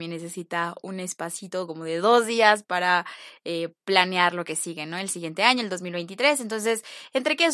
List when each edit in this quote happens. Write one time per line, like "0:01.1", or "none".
none